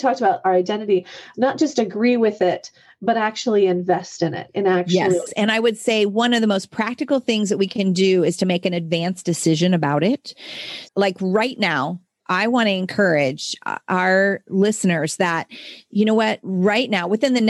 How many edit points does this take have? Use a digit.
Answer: 2